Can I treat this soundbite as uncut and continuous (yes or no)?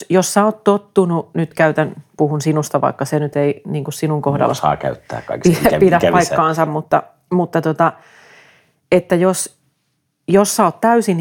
yes